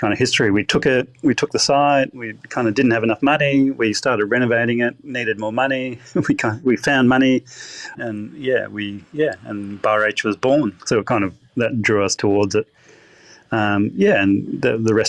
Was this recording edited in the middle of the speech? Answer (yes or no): yes